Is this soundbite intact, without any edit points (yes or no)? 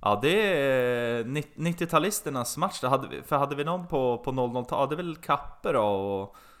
yes